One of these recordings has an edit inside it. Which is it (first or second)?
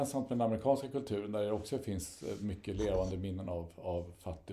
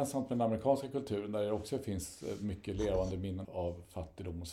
second